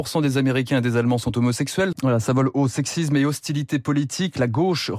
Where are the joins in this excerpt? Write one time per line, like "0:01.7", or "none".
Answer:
0:01.9